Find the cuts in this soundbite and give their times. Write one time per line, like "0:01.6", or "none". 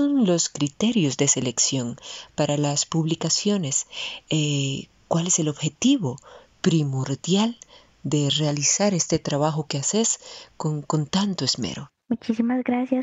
none